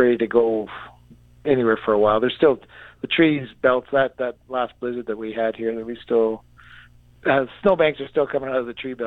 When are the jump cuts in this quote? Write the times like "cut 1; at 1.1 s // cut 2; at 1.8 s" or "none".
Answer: none